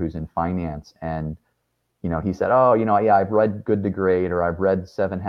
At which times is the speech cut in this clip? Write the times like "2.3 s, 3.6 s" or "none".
none